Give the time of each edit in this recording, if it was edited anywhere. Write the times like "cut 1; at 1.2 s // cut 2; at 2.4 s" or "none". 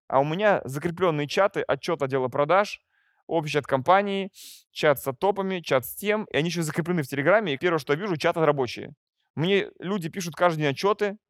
cut 1; at 7.5 s